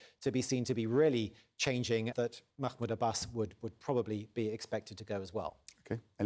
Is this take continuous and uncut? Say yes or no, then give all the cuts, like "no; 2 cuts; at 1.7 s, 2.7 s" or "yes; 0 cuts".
no; 1 cut; at 2.1 s